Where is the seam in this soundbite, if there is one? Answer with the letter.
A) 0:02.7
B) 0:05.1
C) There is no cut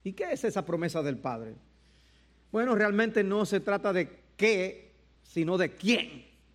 C